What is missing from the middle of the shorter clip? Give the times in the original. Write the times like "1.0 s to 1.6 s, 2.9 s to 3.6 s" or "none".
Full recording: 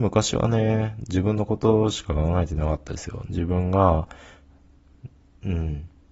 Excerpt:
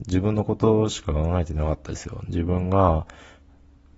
none